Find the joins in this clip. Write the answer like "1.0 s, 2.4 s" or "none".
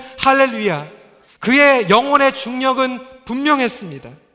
1.3 s